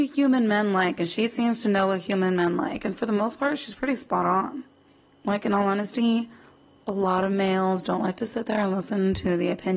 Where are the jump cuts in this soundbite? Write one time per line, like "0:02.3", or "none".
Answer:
none